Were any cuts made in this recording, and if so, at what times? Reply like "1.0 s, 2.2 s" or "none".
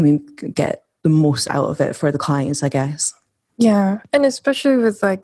none